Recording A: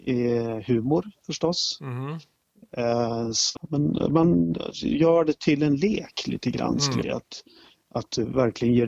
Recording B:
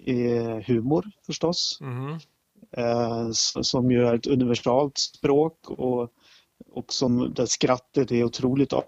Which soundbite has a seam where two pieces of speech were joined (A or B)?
A